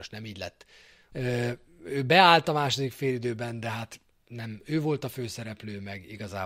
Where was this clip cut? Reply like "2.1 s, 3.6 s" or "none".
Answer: 1.1 s